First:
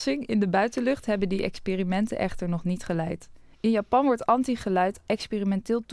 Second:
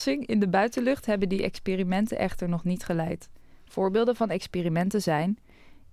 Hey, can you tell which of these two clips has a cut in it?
first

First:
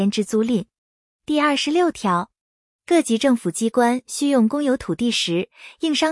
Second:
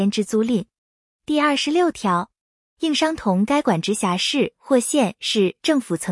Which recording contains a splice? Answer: second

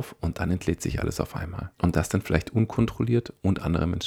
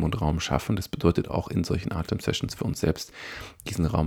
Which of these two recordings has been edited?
first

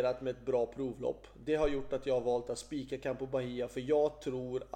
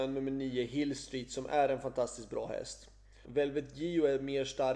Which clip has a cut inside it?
second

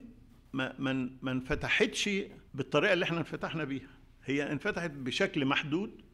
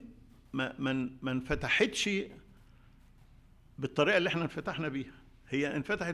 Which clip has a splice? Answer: first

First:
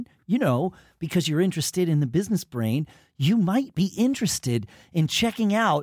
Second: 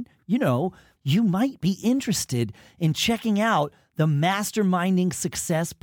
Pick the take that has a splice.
second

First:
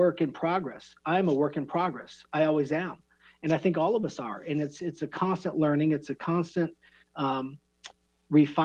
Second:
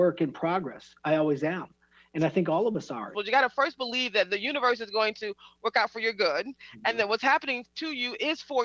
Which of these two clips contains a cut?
second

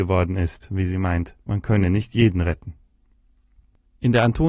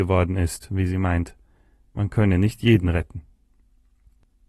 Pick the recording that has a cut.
first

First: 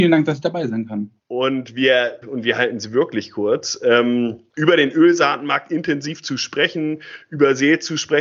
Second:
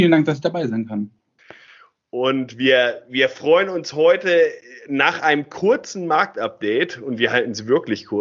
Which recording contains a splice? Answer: first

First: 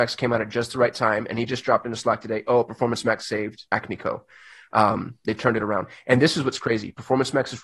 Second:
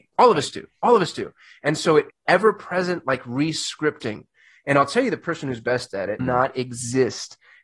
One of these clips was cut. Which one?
second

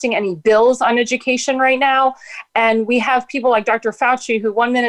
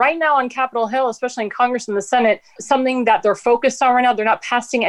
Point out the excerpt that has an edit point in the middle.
second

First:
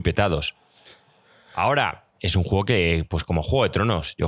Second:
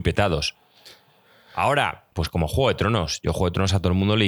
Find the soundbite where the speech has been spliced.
second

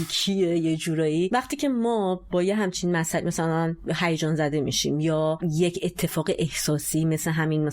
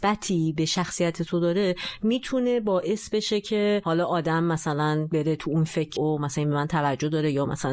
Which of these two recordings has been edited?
second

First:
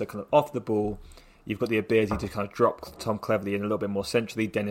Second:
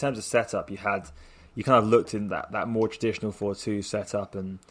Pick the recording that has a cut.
second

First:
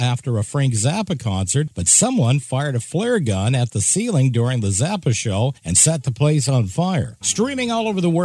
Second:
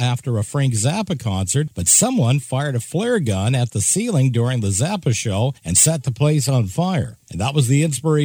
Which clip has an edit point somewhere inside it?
first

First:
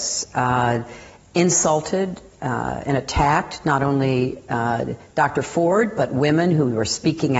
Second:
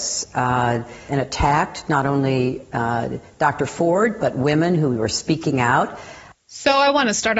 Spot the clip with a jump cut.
second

